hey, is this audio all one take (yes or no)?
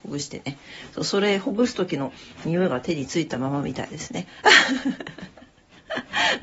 yes